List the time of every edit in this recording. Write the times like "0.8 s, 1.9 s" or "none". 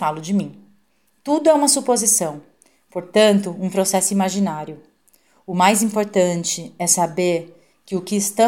none